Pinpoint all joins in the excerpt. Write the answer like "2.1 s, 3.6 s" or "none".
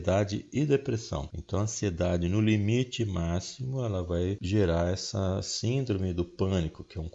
1.3 s

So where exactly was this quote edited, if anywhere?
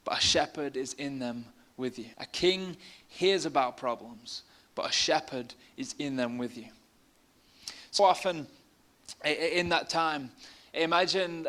2.1 s, 8.0 s

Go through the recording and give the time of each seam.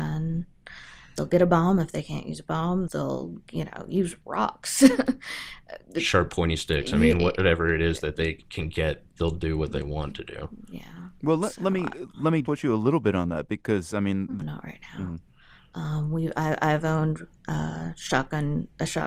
12.4 s, 14.4 s

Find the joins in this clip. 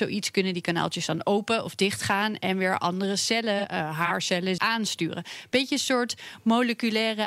4.6 s

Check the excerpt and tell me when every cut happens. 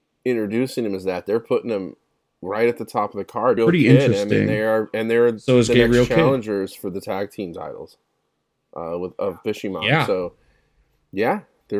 3.6 s

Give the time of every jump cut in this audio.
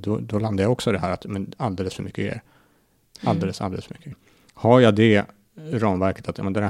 4.1 s

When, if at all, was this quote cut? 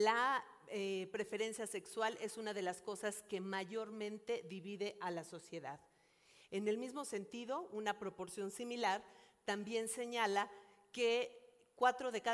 none

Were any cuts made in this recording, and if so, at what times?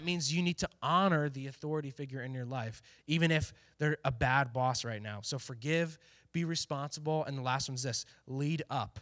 none

